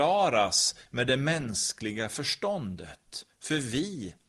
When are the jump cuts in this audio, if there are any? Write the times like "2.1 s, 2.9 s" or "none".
none